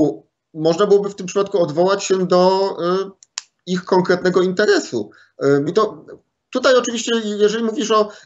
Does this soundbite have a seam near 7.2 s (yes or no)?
no